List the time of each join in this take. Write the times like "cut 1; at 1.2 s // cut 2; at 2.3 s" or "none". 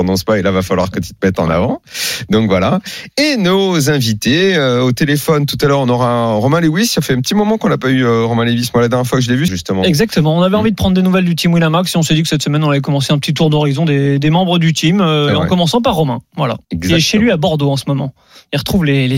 cut 1; at 9.5 s // cut 2; at 16.6 s